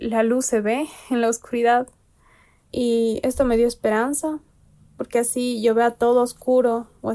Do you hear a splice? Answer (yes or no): yes